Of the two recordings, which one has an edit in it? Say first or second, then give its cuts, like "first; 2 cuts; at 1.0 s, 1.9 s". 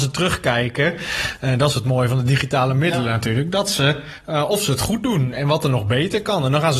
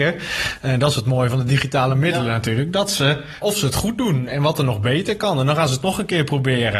second; 1 cut; at 3.4 s